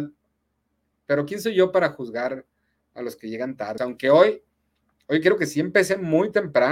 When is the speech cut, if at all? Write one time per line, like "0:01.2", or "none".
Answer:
0:03.8